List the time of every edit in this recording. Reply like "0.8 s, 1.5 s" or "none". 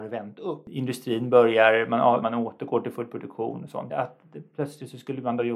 2.2 s, 3.9 s